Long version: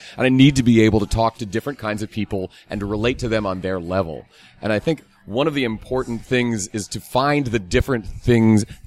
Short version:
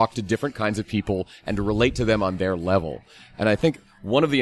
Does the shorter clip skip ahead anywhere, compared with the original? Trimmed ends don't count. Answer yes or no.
no